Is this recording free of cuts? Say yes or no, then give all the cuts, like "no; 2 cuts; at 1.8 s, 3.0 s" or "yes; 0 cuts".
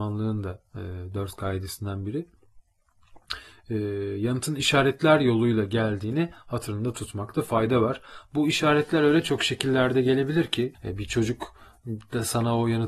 no; 1 cut; at 10.7 s